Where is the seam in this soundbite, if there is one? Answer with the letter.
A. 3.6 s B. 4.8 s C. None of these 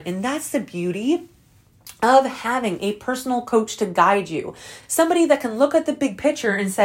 C